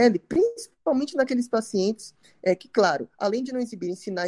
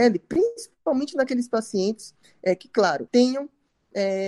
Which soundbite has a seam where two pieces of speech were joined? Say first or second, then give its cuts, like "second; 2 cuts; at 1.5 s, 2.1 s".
second; 1 cut; at 3.1 s